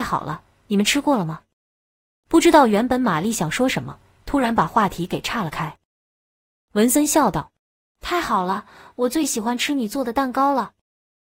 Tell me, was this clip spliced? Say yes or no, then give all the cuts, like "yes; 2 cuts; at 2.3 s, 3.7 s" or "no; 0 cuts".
yes; 1 cut; at 6.3 s